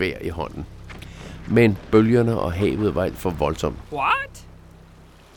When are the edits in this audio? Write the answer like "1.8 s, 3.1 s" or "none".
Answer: 3.8 s